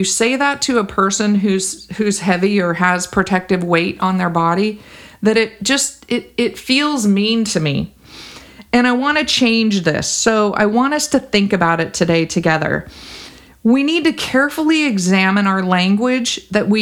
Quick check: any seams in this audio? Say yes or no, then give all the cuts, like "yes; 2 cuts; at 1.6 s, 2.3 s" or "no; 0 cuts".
no; 0 cuts